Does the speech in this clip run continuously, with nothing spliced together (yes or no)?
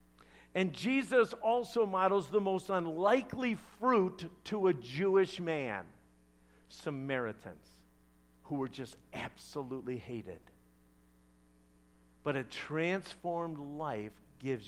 yes